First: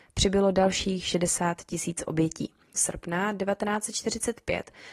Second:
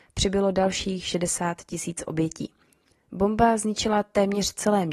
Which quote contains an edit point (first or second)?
first